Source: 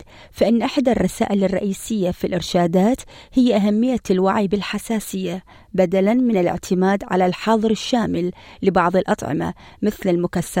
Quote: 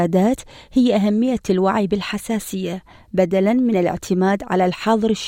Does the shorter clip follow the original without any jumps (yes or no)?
yes